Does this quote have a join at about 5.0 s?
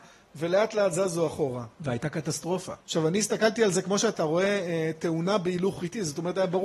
no; 2 cuts; at 1.7 s, 2.8 s

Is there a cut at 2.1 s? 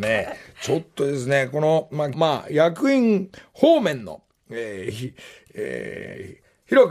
yes; 1 cut; at 2.1 s

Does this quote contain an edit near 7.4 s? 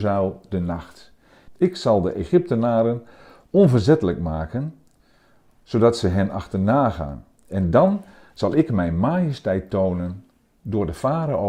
no; 1 cut; at 1.5 s

